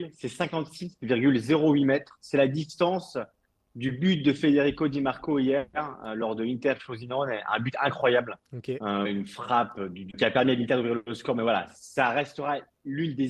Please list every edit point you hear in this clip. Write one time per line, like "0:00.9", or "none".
0:09.0
0:10.1